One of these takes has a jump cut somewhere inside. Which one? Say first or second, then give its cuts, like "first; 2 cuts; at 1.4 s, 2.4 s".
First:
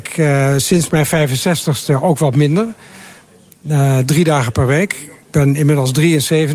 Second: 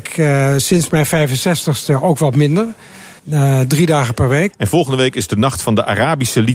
second; 2 cuts; at 3.2 s, 4.5 s